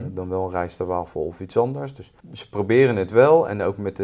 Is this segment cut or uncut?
cut